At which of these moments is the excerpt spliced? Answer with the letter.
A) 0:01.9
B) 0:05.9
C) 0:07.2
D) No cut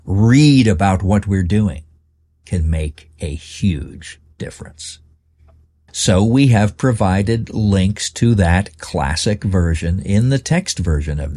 B